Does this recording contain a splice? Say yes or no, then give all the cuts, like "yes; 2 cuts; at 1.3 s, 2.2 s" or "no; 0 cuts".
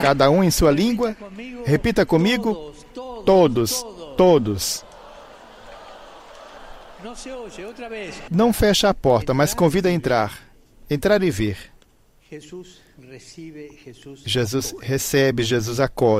yes; 1 cut; at 8.3 s